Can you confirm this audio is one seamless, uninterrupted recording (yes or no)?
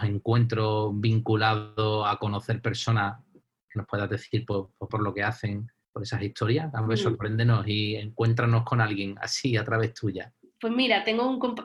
no